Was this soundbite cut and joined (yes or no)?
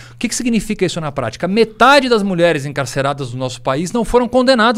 no